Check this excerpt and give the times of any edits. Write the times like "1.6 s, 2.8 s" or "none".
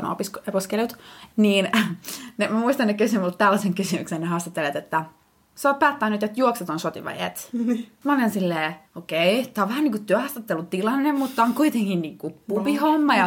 8.9 s